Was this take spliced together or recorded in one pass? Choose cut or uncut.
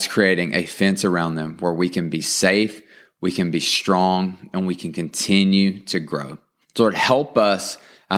cut